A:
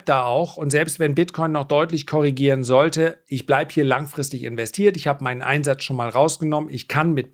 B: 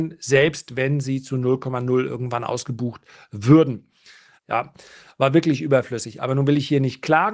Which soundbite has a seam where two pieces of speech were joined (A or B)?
B